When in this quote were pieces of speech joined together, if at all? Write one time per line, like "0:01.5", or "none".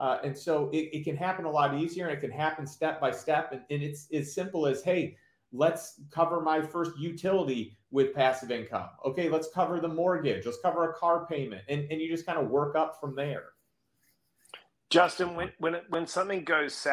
none